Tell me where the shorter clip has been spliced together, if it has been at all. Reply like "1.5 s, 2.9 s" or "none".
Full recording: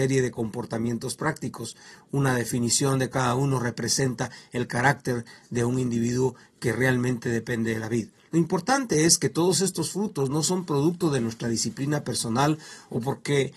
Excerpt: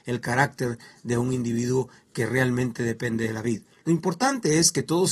none

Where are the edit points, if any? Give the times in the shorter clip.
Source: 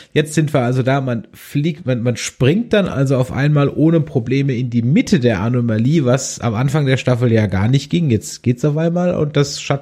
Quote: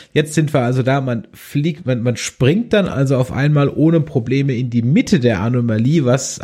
none

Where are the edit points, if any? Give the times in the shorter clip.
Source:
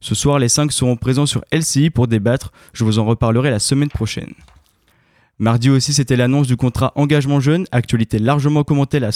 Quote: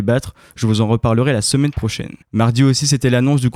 2.2 s

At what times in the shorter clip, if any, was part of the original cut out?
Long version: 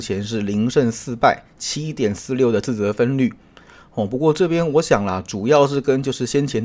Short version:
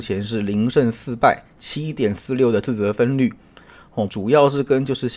4.1 s

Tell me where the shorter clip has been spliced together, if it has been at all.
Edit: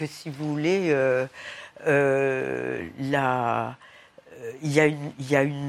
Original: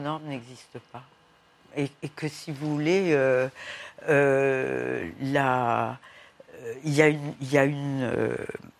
none

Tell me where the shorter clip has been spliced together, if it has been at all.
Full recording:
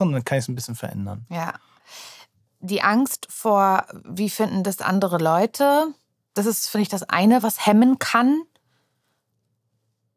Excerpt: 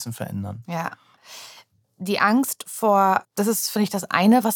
3.2 s

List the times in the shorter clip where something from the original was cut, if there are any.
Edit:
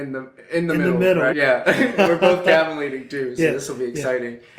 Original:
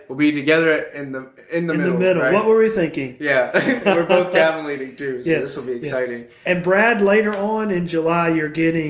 1.3 s

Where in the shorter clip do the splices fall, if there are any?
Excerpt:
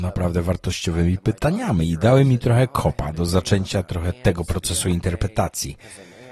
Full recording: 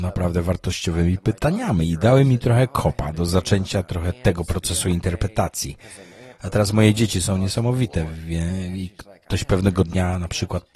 none

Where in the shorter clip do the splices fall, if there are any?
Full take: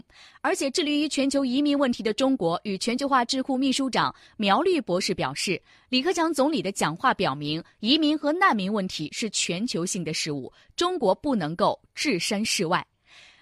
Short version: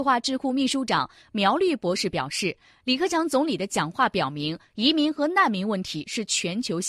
none

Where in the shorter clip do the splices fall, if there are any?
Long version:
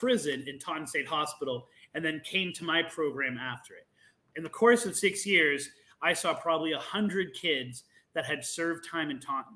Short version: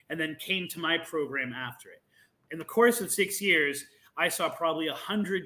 none

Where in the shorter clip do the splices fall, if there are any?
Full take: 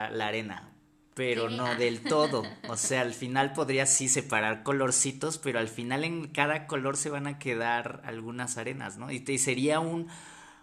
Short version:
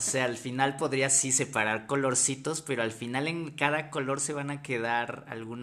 none

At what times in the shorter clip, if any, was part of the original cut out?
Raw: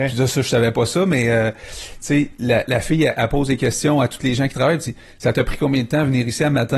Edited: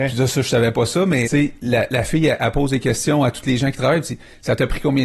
1.2 s

